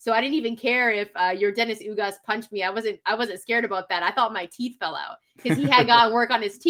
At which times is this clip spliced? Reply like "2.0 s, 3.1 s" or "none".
none